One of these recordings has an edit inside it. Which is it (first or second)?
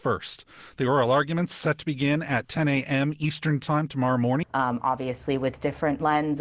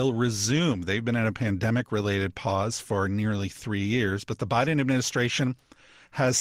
first